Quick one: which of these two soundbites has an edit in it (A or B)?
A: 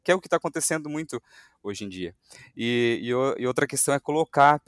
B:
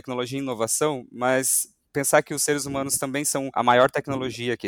B